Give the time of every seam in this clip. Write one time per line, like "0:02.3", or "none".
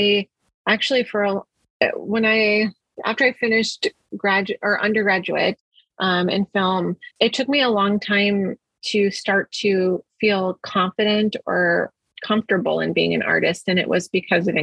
0:07.1